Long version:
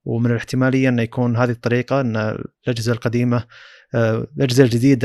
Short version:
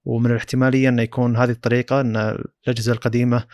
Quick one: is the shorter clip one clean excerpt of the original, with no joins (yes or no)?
yes